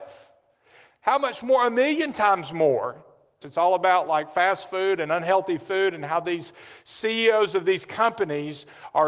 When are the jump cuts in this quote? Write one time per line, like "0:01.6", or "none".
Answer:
0:03.4